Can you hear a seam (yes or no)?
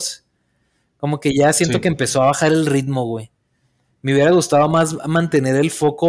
no